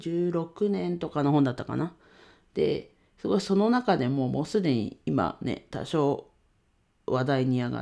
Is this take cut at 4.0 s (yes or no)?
no